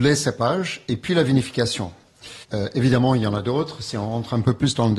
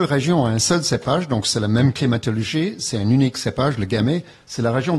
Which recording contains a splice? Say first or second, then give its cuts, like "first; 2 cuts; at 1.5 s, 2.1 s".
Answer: first; 1 cut; at 2.4 s